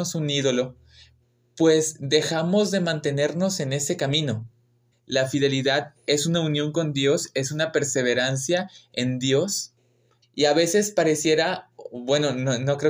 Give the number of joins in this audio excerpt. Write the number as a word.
two